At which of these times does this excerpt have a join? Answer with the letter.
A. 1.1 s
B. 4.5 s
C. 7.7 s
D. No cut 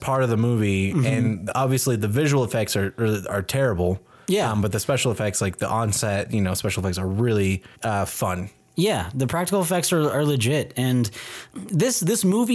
C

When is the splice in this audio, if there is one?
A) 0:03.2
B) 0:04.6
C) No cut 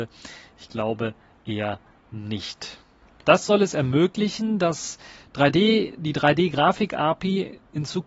A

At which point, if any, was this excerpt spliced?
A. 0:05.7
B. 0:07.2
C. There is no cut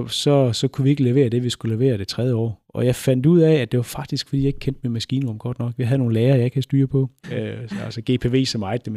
B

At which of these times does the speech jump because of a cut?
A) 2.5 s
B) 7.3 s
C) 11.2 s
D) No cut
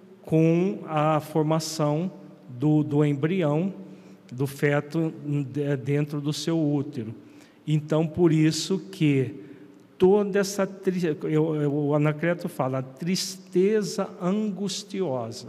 D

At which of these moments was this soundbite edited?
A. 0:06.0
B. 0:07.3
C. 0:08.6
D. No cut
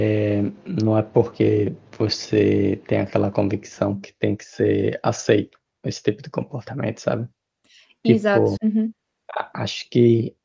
C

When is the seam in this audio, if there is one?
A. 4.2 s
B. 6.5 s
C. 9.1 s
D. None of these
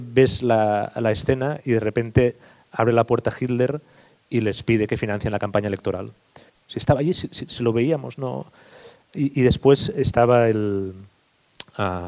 B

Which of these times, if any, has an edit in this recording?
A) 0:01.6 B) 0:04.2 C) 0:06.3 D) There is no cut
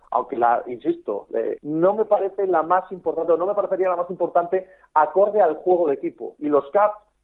A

